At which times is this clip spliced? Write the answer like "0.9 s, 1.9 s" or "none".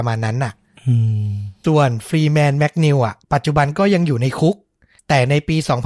1.6 s, 3.2 s